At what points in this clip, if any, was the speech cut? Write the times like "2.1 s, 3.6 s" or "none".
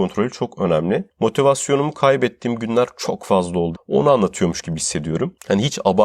3.7 s

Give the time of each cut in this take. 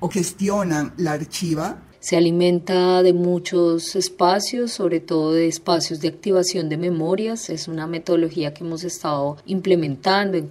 none

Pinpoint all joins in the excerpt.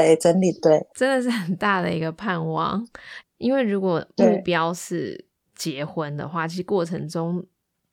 3.2 s

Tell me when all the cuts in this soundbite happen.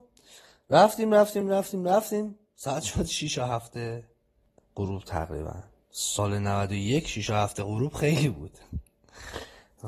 1.4 s

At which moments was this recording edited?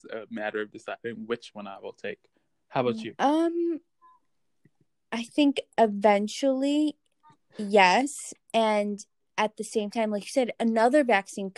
3.1 s, 8.4 s

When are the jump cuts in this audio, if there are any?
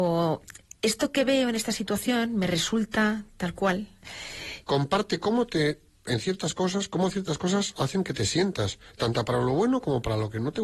4.6 s

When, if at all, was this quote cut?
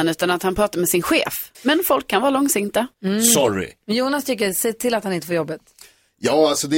1.5 s, 2.9 s

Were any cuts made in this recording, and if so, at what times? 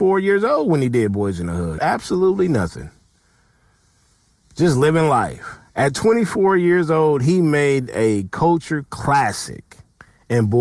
1.8 s

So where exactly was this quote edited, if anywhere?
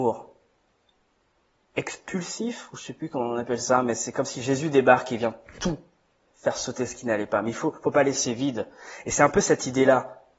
none

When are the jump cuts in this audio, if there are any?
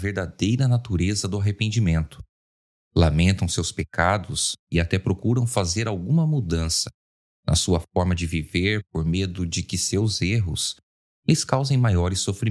none

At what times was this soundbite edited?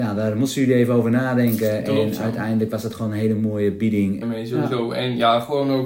4.2 s

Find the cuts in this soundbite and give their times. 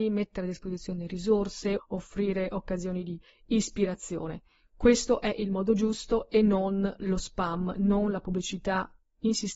1.8 s

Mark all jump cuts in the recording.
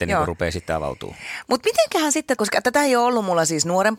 2.4 s

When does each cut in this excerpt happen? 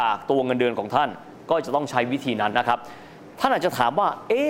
2.5 s

